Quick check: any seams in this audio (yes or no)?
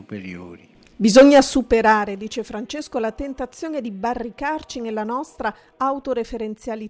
no